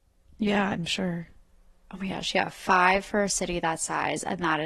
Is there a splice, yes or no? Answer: no